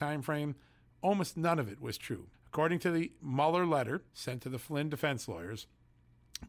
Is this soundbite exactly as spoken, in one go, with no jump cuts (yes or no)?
no